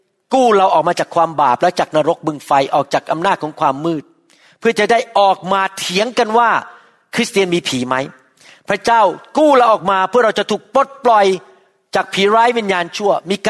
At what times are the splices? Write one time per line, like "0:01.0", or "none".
none